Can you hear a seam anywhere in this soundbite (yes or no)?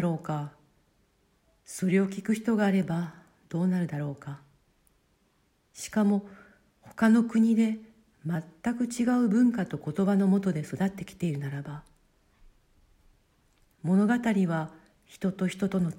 no